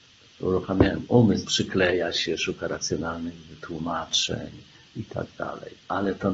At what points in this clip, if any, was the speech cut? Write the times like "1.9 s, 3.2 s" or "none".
1.5 s